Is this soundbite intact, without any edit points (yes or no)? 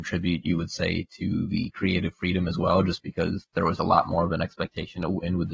yes